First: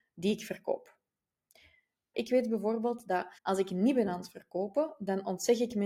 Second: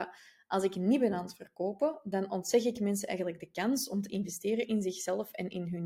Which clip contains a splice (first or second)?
first